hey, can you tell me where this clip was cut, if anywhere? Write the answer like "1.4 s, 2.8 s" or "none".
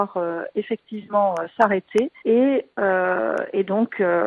2.2 s